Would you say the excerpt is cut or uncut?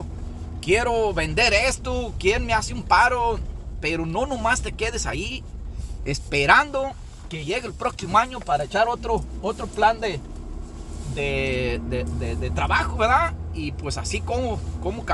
uncut